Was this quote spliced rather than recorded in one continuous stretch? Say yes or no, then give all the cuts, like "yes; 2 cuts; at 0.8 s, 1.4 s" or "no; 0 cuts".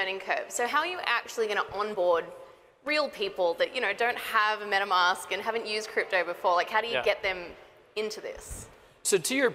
no; 0 cuts